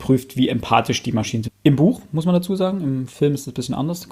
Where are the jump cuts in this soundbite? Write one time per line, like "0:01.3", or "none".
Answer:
0:01.5